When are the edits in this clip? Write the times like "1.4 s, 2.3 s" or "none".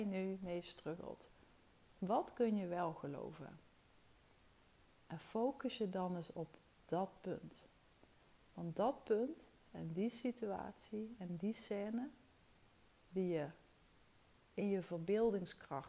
none